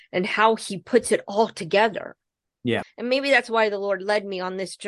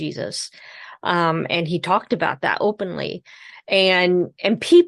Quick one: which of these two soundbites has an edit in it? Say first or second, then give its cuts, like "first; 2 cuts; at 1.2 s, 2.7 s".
first; 1 cut; at 2.8 s